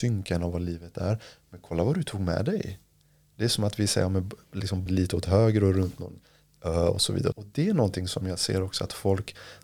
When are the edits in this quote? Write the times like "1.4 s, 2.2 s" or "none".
4.9 s, 7.3 s